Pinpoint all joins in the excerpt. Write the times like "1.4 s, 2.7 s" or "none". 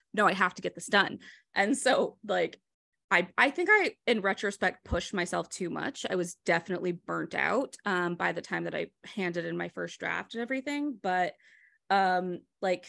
none